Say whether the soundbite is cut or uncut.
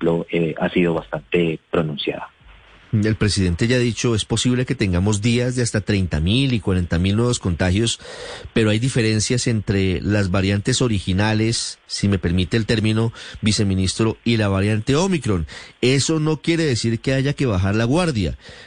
uncut